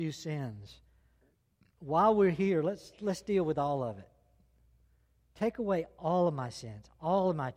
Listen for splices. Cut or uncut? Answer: uncut